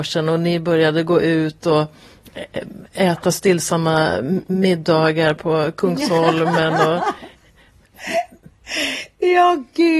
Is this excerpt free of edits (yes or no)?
yes